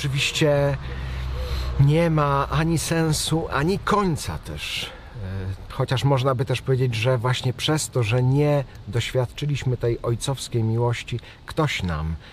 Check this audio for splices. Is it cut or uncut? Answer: cut